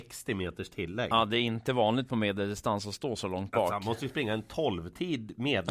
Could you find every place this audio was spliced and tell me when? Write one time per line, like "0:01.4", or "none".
none